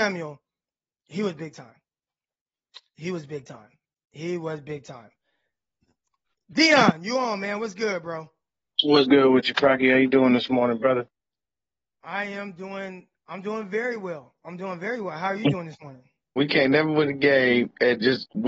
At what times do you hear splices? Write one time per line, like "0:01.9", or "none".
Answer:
0:16.4

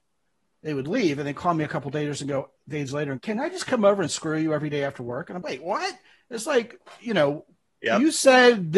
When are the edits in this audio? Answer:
0:03.2
0:05.4

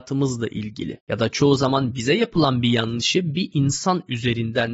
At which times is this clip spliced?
0:01.0

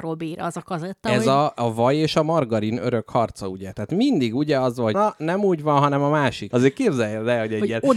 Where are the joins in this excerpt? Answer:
0:04.9
0:06.5

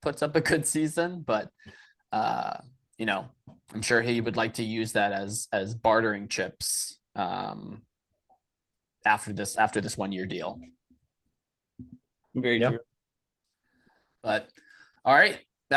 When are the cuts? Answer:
none

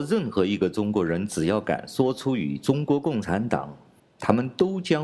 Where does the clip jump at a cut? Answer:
0:04.0

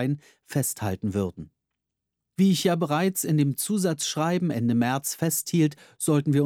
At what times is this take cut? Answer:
none

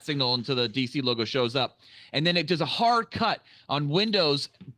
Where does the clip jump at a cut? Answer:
none

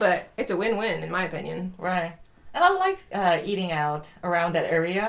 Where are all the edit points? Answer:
none

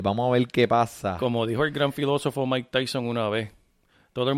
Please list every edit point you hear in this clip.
none

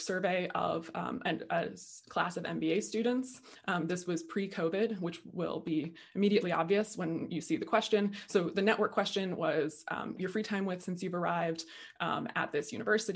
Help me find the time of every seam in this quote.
0:10.2

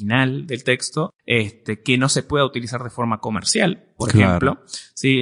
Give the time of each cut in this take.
0:01.2

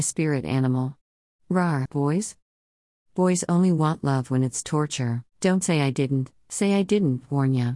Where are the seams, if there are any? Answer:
0:01.9
0:05.3

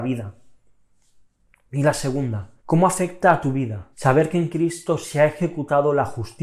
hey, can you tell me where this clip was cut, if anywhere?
0:02.6
0:03.9

